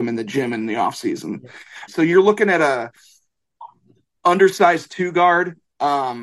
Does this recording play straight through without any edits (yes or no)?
no